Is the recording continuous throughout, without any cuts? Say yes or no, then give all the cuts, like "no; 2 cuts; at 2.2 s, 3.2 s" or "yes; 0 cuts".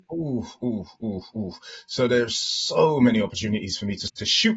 yes; 0 cuts